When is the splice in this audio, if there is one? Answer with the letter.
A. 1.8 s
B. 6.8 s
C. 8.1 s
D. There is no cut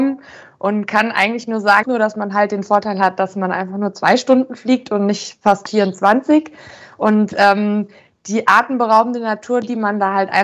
A